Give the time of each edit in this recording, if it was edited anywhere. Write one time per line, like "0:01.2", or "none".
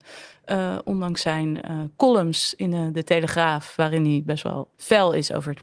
0:04.7

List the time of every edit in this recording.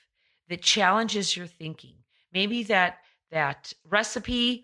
none

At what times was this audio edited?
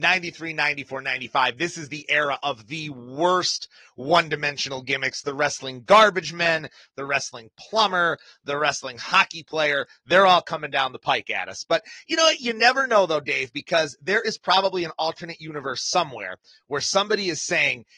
none

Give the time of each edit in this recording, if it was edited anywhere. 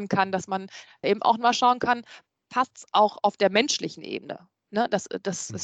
0:01.0

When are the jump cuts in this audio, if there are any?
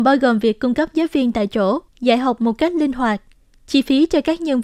0:01.9

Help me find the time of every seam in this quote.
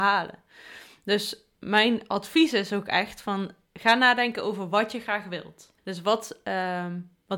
0:05.8

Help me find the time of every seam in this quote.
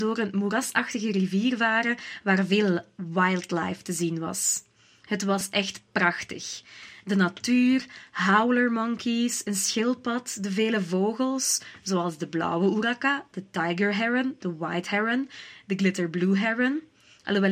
none

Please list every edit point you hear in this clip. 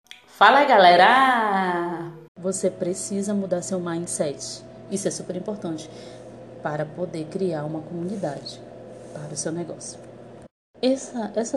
0:02.3
0:04.9

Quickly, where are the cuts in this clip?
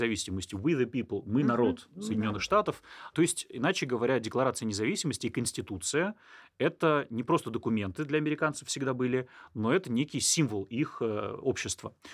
none

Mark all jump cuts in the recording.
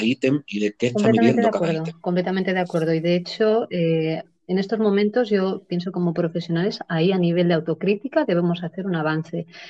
none

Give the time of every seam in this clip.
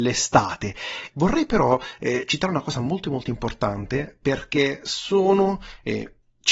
0:01.1

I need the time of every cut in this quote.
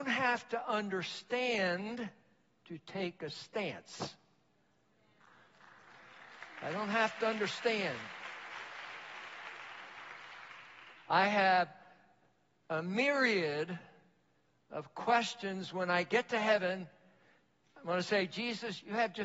none

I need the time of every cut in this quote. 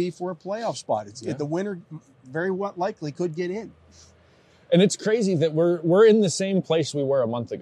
none

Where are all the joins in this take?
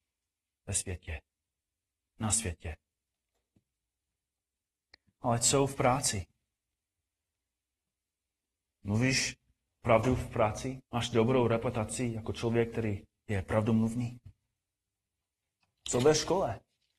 0:10.8

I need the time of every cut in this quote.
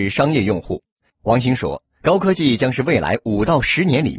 0:01.1

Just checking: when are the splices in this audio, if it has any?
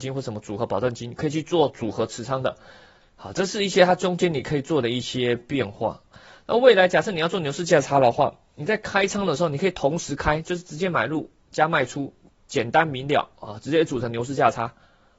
0:03.0

